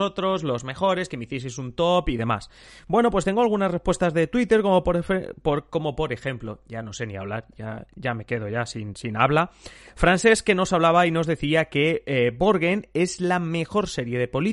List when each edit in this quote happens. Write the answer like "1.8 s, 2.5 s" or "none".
none